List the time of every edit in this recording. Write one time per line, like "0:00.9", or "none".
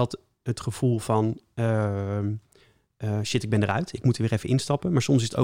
none